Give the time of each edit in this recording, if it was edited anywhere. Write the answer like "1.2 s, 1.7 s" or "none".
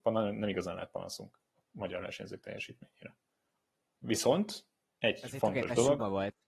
none